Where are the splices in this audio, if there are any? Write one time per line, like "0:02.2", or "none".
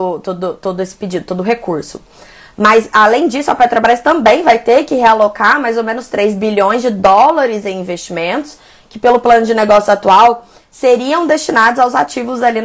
none